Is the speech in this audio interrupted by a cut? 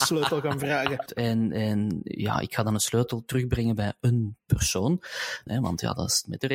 yes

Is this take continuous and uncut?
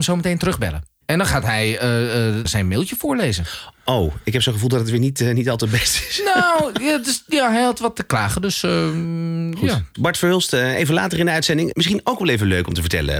no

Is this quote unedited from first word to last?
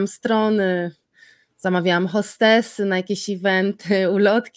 yes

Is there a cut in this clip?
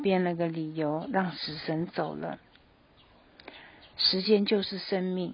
no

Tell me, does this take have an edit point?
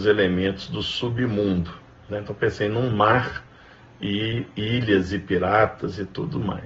yes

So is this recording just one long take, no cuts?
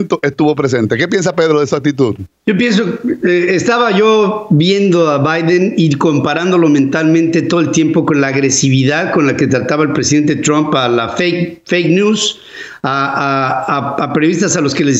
no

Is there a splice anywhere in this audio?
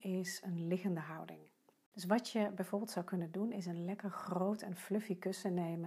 no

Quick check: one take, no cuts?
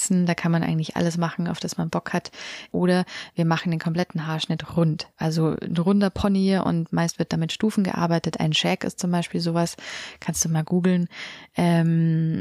no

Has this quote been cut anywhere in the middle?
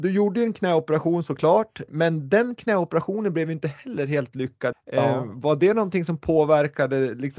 yes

